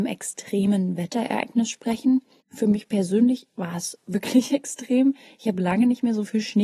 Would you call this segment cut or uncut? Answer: uncut